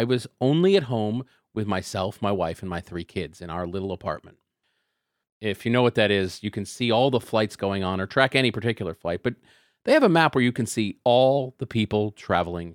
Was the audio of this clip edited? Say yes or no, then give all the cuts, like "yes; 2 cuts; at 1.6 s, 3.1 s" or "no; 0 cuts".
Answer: yes; 1 cut; at 5.2 s